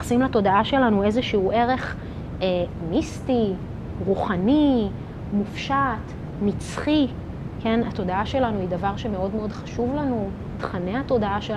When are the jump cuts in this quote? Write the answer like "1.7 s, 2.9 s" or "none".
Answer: none